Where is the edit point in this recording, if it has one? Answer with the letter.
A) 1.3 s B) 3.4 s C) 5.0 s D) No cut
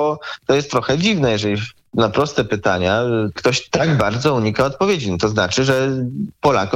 B